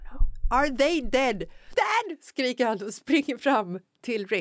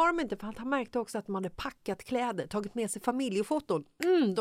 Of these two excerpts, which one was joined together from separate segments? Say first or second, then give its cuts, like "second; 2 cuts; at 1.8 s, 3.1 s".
first; 1 cut; at 1.7 s